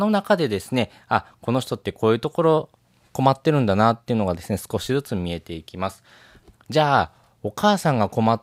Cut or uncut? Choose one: cut